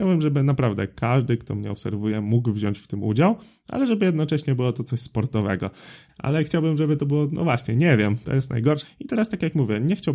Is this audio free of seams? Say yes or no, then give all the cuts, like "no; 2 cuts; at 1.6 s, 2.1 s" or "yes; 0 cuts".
no; 2 cuts; at 6.1 s, 8.8 s